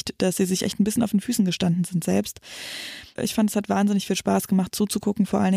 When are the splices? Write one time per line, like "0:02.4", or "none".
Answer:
0:03.2